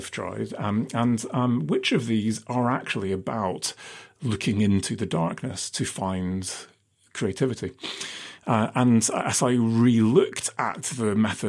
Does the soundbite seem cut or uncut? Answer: cut